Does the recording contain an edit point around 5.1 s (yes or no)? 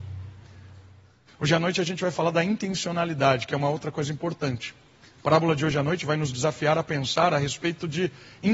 no